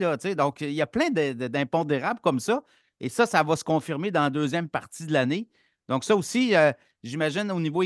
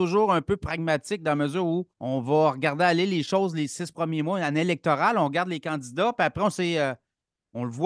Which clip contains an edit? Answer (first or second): second